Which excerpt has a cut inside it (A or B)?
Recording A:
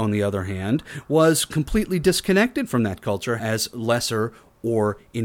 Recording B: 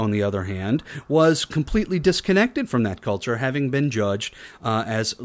A